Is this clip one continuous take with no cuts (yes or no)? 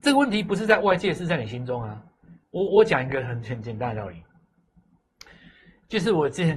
no